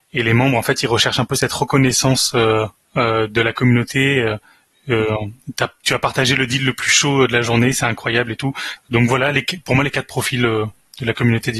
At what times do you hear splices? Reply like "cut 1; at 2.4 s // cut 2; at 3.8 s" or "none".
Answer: cut 1; at 8.8 s